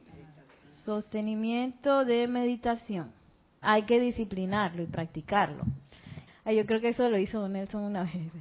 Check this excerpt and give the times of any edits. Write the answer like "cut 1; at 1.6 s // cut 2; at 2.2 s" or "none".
cut 1; at 3.6 s // cut 2; at 6.3 s